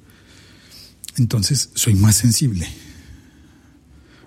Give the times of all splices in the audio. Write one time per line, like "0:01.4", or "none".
none

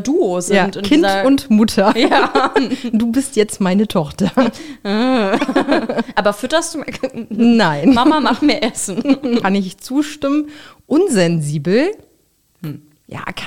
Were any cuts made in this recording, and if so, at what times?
0:09.4

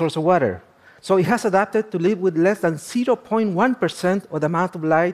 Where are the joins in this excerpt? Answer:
0:01.0

